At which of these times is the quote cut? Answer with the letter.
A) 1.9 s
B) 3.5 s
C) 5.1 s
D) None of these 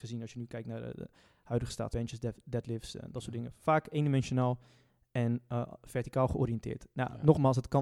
A